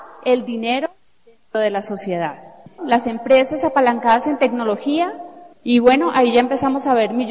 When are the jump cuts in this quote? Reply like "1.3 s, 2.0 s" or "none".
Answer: 2.8 s